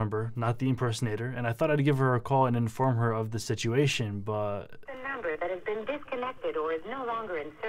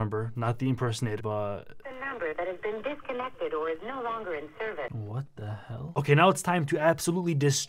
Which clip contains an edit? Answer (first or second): second